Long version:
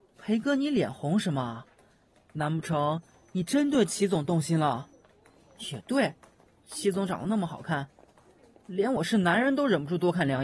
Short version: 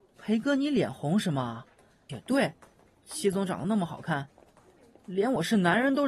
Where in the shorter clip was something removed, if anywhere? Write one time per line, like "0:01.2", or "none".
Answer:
0:02.1